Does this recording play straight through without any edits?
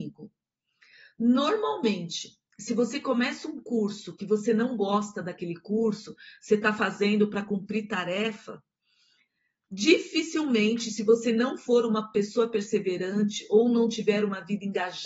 yes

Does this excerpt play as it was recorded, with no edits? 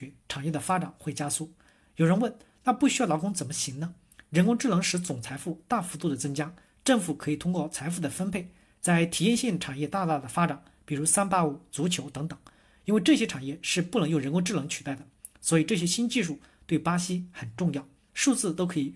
no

